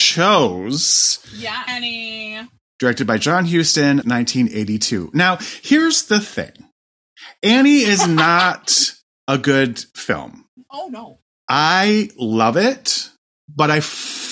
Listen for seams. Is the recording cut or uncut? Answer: cut